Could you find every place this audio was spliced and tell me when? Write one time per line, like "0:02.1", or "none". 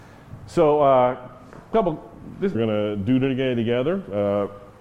0:02.5